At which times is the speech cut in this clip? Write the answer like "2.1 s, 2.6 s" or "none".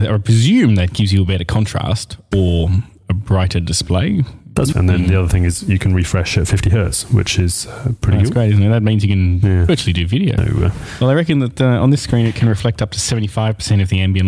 4.7 s, 10.4 s